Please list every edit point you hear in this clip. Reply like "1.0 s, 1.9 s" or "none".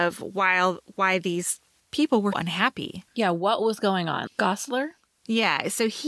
2.3 s, 4.3 s